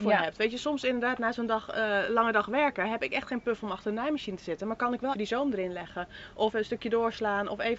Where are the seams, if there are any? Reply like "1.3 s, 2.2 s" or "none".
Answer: 5.1 s, 6.5 s